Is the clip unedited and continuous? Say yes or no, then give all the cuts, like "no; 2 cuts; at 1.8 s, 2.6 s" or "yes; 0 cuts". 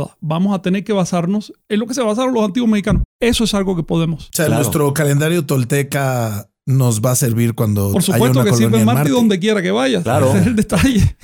yes; 0 cuts